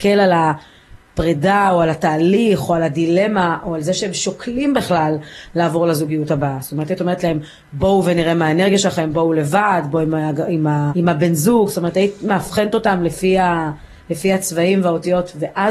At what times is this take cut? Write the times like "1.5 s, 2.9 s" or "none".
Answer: 10.9 s